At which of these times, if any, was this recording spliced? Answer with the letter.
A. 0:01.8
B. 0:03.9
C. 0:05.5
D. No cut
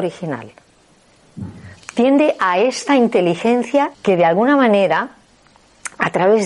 B